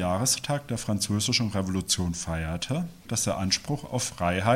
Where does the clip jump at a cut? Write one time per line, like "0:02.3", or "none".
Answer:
0:03.1

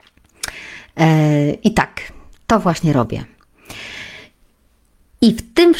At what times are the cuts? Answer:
none

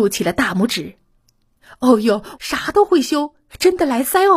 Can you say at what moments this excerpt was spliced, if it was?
0:02.4

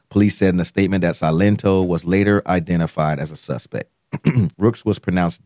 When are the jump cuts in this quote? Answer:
0:04.5

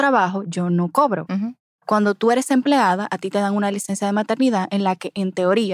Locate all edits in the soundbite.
none

